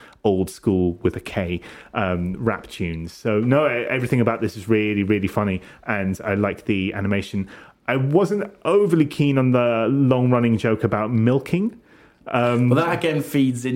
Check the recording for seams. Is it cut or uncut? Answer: uncut